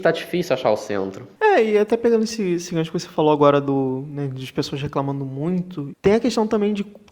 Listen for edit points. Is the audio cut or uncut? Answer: cut